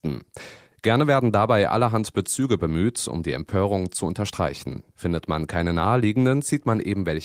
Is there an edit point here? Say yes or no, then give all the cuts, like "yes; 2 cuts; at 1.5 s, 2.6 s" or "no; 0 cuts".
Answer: no; 0 cuts